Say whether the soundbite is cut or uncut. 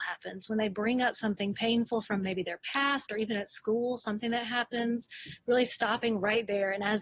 uncut